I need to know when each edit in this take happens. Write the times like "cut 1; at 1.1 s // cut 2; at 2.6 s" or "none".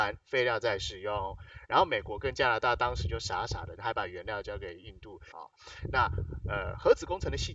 cut 1; at 3.8 s // cut 2; at 5.3 s